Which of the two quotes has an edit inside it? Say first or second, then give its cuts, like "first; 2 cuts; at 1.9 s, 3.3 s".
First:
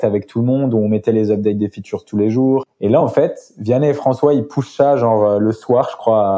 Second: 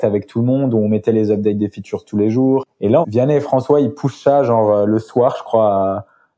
second; 1 cut; at 3.0 s